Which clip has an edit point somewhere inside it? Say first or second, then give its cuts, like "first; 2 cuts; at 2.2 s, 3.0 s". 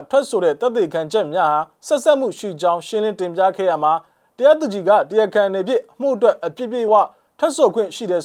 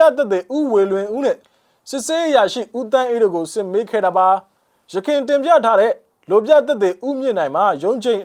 first; 1 cut; at 6.9 s